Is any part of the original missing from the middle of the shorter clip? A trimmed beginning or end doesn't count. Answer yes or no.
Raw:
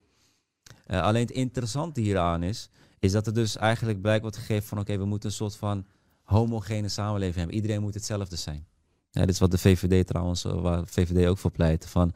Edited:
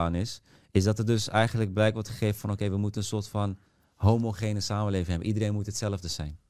no